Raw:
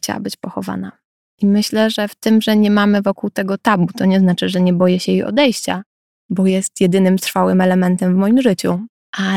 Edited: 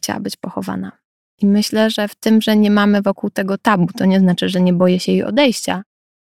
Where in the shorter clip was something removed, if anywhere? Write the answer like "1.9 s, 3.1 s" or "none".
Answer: none